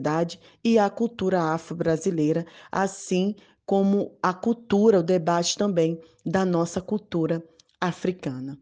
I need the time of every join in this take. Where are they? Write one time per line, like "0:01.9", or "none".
none